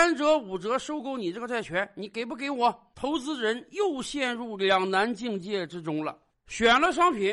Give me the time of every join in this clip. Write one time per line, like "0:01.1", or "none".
0:06.3